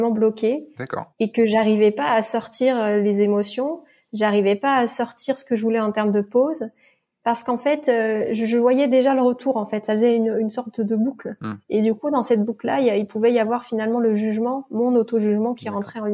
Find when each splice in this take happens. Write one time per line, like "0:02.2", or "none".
none